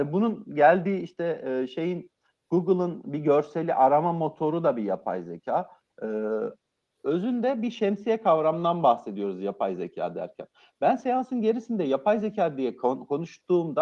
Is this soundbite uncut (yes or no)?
yes